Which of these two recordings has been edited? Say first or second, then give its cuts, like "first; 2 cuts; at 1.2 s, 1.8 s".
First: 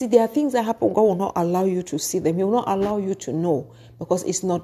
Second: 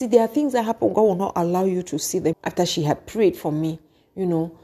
second; 1 cut; at 2.3 s